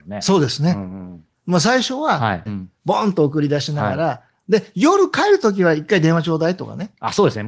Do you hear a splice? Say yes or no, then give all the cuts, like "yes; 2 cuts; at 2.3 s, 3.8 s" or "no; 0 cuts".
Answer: yes; 1 cut; at 2.5 s